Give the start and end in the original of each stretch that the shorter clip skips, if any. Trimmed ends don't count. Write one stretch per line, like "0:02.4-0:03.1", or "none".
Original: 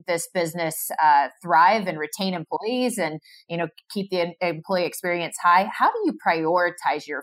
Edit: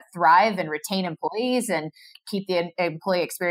0:03.4-0:03.8